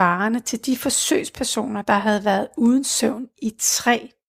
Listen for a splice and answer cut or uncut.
uncut